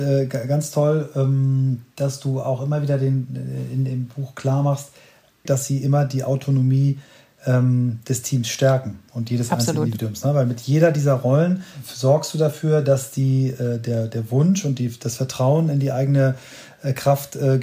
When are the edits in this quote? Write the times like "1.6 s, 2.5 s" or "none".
5.5 s